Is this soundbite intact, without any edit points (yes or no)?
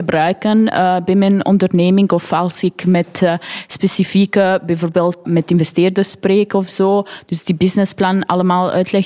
no